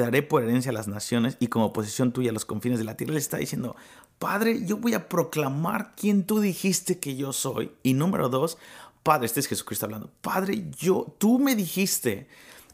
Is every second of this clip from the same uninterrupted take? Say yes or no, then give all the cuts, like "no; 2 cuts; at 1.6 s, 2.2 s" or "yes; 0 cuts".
yes; 0 cuts